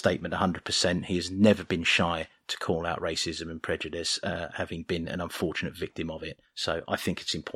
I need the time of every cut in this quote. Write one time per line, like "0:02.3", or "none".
none